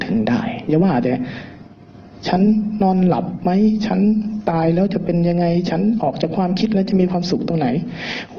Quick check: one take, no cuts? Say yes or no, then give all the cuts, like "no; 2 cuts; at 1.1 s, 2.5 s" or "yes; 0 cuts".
yes; 0 cuts